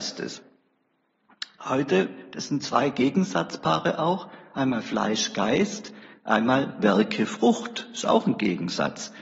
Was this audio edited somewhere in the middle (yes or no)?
no